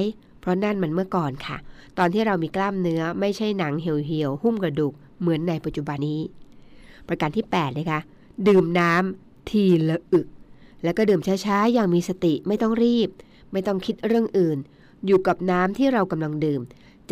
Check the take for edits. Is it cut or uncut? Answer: cut